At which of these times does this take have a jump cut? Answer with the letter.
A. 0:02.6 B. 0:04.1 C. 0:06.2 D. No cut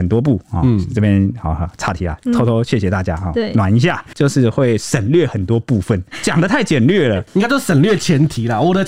B